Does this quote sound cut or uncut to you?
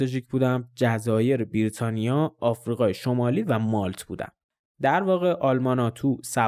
cut